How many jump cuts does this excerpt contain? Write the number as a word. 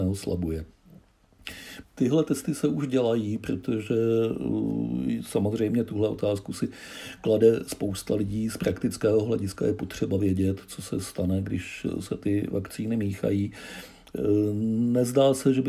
one